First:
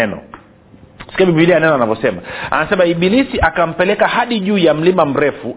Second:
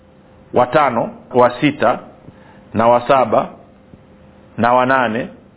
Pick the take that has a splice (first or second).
second